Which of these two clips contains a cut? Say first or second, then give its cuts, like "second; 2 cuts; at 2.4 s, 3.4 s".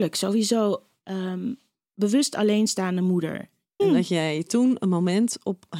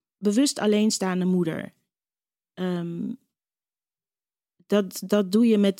first; 1 cut; at 3.8 s